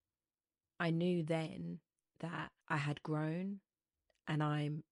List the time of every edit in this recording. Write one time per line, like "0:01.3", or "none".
0:02.6